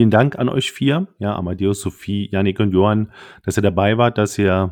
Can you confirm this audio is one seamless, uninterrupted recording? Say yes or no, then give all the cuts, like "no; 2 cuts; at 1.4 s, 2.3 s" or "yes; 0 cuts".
yes; 0 cuts